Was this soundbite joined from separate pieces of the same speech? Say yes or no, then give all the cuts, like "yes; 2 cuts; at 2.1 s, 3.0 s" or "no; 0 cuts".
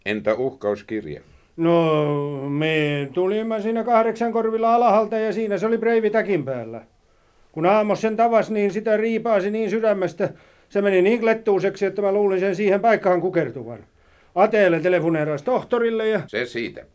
no; 0 cuts